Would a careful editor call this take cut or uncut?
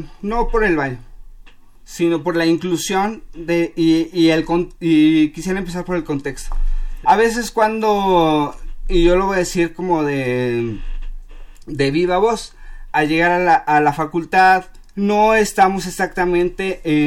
cut